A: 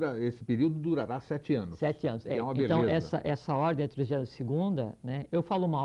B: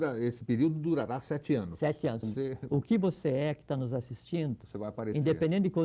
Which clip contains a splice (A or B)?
B